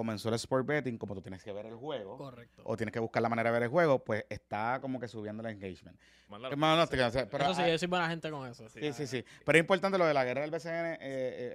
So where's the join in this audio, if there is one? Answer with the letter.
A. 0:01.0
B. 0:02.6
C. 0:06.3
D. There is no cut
C